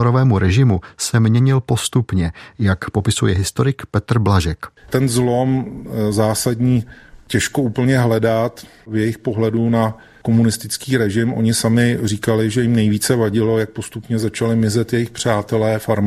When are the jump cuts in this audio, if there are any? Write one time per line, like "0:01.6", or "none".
0:04.8